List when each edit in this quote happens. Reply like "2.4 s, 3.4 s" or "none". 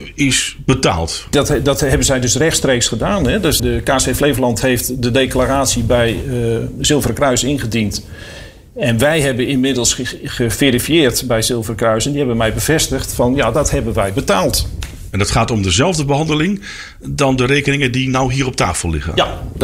3.6 s

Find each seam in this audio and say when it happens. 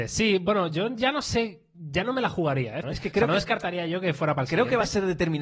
2.8 s

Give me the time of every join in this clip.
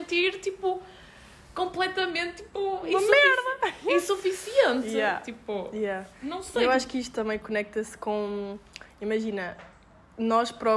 none

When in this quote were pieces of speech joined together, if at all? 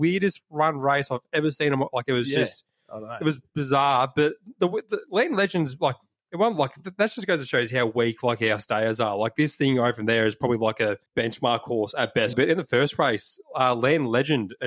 11.1 s, 12.3 s

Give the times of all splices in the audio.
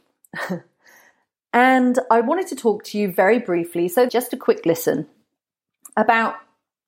4.1 s

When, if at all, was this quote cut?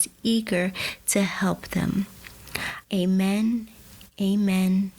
2.8 s

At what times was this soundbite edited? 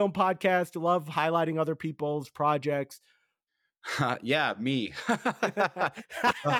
3.5 s

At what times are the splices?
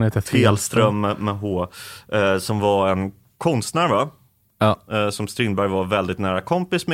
none

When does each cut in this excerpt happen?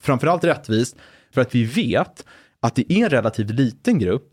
1.3 s

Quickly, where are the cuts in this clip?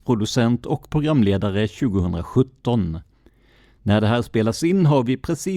none

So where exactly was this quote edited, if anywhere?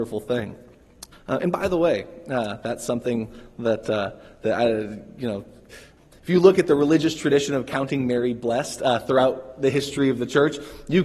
1.1 s

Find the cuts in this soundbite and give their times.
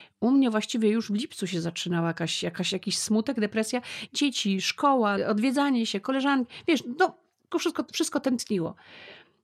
4.1 s, 5.2 s, 7.5 s

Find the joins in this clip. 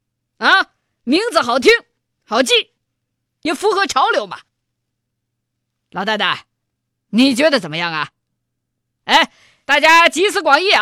none

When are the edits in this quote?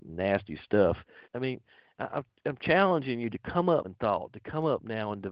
1.2 s, 3.8 s

